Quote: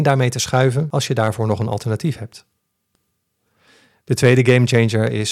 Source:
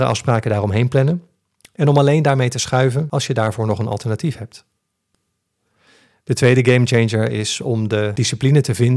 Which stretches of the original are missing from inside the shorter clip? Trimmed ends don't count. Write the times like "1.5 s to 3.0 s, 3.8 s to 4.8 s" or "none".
none